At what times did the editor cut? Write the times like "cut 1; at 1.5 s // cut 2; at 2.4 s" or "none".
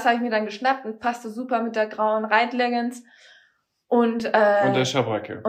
none